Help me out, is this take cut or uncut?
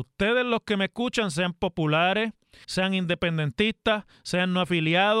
cut